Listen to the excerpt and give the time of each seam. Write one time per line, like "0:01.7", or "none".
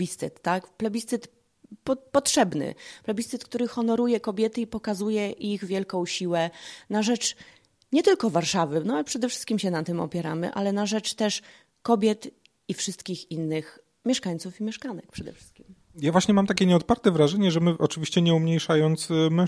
none